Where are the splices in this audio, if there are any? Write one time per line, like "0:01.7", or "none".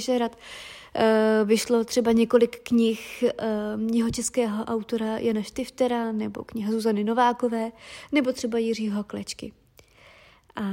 none